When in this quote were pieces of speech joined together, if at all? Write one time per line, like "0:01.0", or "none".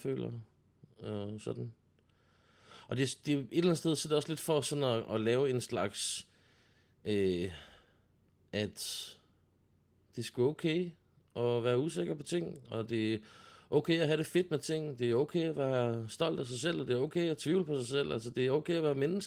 0:08.4